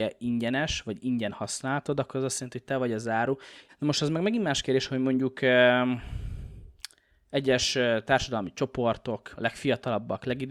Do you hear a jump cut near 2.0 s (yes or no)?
no